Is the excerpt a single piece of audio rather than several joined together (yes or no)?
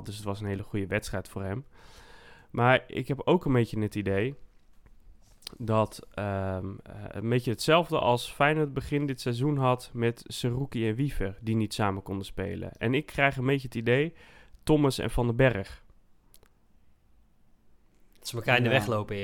yes